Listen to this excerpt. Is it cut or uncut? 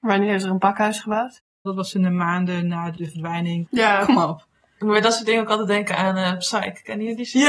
cut